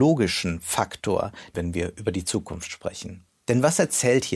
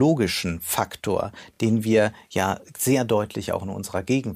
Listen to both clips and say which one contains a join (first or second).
first